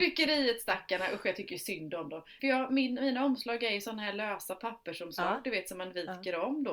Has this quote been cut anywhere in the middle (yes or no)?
yes